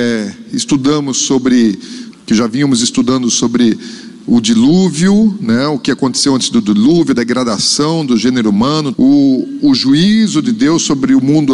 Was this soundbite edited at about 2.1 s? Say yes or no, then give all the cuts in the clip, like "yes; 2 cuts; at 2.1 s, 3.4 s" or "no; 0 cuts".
yes; 2 cuts; at 2.1 s, 8.9 s